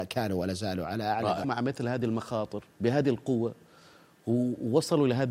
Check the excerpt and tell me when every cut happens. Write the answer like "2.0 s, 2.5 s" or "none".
1.4 s, 2.7 s